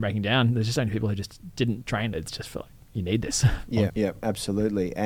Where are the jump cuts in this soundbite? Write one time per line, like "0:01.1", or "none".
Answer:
0:02.1
0:03.9